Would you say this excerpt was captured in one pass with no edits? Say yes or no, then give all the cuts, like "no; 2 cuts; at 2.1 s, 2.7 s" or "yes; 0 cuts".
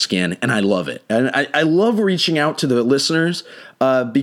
yes; 0 cuts